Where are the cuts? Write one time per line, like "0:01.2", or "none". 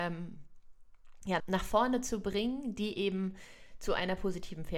0:01.4